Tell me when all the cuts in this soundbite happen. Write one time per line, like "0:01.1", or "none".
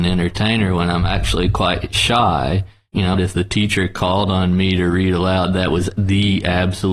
0:03.1